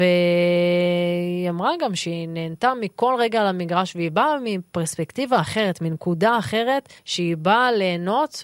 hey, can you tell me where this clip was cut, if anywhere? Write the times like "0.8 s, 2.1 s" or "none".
7.0 s